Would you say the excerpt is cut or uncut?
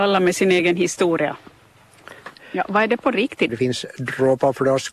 cut